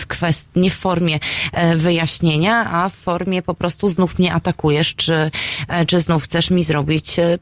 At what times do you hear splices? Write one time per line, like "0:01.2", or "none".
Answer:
none

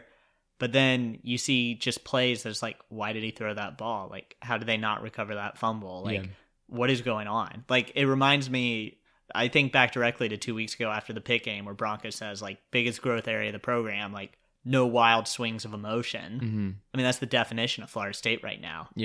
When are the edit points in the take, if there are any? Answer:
none

